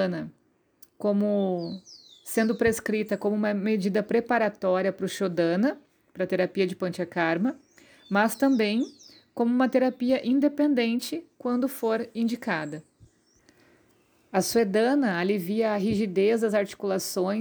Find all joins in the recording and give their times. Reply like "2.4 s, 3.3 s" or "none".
none